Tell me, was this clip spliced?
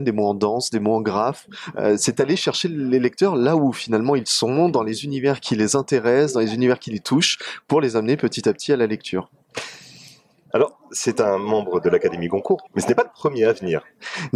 yes; 2 cuts; at 10.5 s, 12.7 s

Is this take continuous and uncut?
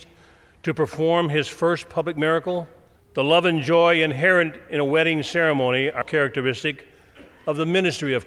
no; 2 cuts; at 3.0 s, 6.0 s

